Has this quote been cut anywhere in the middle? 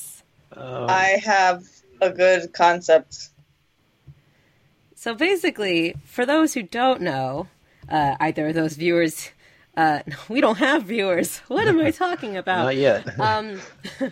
no; 0 cuts

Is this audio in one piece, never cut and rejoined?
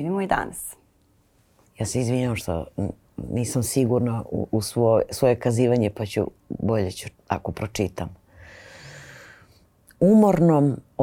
no; 3 cuts; at 1.7 s, 4.5 s, 7.2 s

